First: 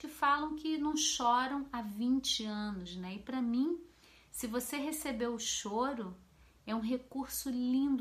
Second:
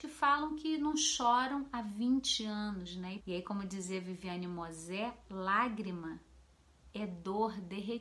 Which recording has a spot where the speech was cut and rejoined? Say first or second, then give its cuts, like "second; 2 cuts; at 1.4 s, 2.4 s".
second; 1 cut; at 3.2 s